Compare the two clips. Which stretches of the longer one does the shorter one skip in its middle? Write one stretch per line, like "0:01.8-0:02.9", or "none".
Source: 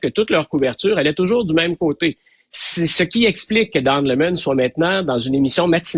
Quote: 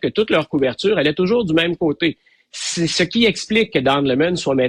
none